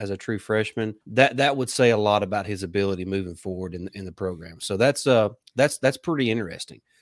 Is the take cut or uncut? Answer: cut